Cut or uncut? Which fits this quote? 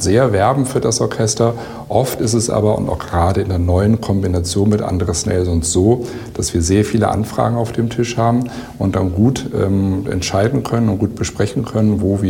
uncut